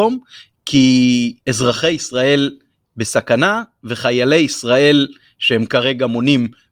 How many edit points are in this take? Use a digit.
1